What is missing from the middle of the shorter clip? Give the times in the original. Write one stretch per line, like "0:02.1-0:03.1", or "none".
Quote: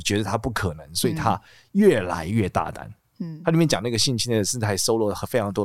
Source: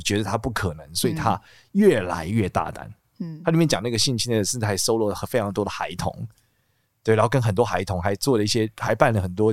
none